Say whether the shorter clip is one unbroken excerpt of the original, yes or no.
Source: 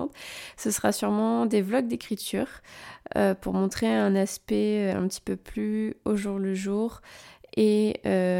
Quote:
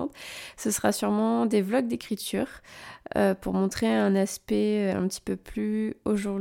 yes